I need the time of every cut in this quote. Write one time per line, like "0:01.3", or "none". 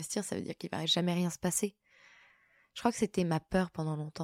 none